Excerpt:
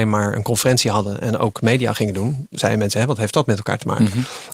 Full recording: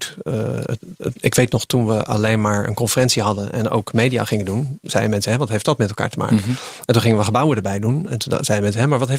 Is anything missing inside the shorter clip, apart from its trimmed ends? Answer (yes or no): no